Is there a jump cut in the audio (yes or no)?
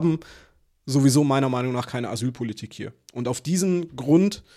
no